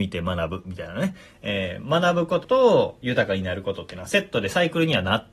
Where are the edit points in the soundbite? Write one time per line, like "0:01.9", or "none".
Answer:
0:02.4